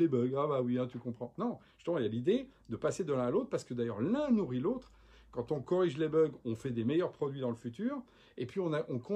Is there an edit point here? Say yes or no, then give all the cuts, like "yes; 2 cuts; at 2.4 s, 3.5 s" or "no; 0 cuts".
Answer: no; 0 cuts